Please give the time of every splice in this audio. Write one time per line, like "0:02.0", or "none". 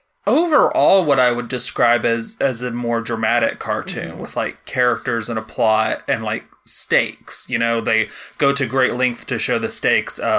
none